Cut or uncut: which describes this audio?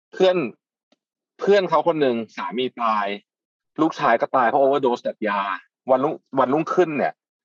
uncut